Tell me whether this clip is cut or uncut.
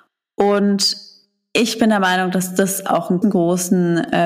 cut